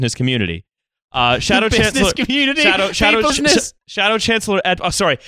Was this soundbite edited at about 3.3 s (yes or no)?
yes